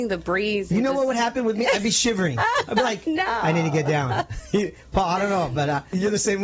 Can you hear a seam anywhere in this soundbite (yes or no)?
no